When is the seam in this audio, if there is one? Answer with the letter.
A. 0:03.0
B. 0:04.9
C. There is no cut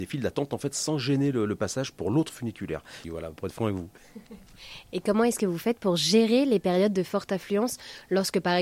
A